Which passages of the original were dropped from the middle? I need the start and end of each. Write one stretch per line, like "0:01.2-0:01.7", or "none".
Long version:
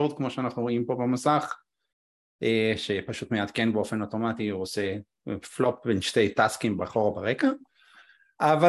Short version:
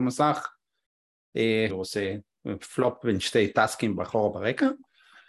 0:02.8-0:04.5